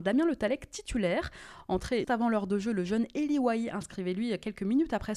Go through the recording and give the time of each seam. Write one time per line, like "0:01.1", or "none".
0:02.0